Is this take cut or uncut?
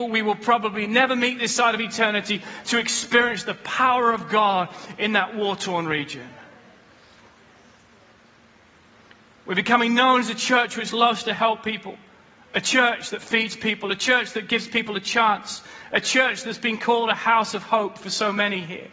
uncut